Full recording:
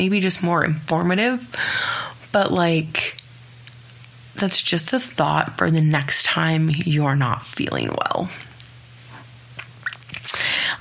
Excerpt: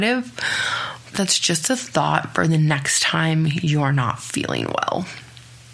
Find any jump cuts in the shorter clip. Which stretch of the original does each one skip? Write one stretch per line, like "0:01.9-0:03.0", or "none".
0:02.3-0:04.3